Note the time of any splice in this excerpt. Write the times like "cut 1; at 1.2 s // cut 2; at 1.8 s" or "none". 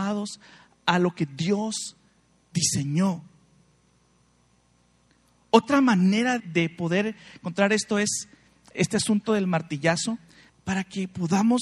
cut 1; at 6.4 s // cut 2; at 10.5 s